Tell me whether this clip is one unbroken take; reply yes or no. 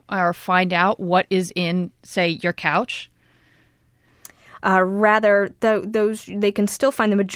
no